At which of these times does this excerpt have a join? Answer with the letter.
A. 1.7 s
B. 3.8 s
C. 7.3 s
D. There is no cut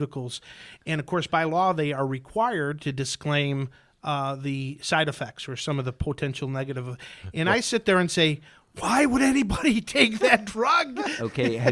D